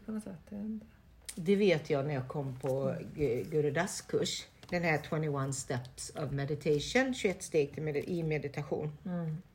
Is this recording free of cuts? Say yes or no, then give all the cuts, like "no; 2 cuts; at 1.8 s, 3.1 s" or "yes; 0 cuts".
no; 1 cut; at 4.7 s